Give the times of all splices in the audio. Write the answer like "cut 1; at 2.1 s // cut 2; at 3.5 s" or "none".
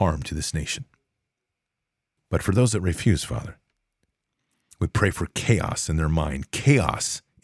cut 1; at 2.2 s